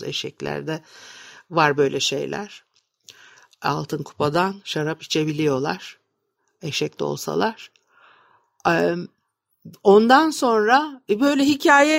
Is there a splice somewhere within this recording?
no; 0 cuts

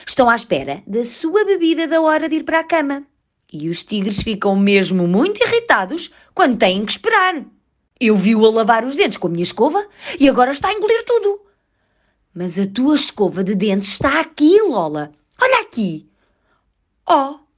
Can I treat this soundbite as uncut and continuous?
no; 1 cut; at 7.9 s

